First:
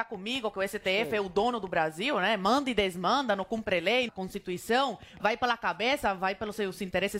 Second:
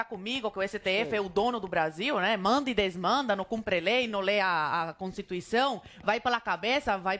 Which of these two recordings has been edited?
first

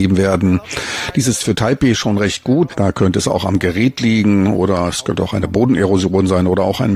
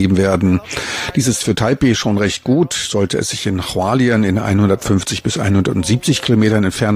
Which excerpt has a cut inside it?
first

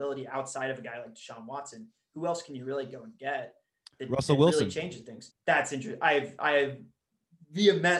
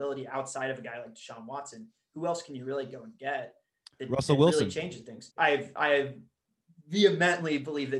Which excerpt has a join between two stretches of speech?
second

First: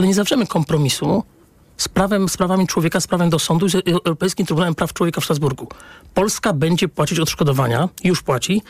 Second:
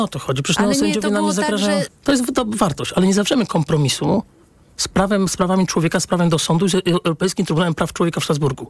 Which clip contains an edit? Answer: second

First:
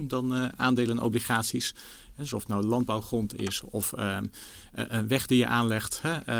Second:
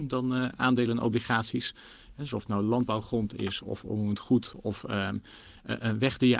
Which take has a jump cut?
first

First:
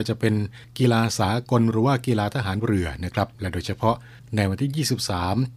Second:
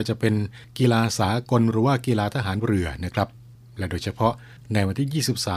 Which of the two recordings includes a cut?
first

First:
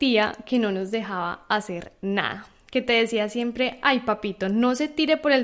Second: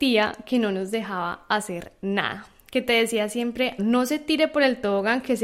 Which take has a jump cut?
second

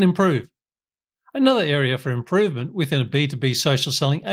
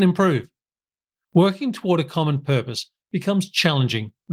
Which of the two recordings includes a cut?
second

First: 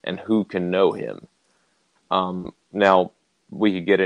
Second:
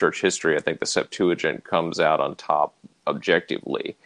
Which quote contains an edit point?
first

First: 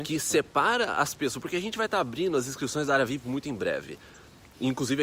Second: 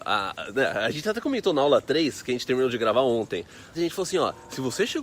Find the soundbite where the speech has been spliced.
second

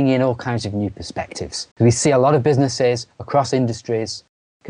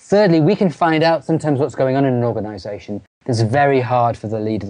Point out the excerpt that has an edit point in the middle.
first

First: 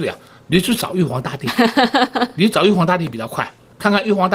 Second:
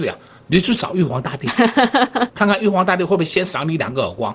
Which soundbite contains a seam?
second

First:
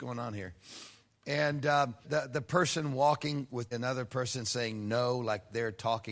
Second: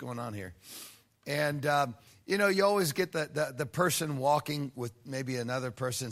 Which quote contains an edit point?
first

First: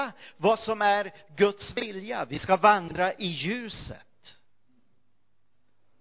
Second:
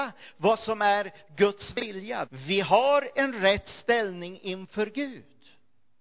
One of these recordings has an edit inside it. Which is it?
second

